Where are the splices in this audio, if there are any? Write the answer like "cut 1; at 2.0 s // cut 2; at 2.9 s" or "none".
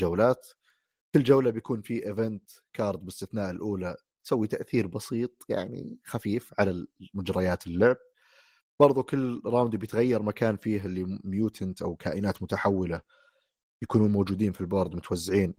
none